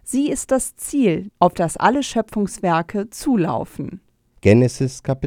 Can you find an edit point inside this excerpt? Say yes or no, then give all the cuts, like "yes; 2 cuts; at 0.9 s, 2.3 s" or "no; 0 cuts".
yes; 1 cut; at 4.4 s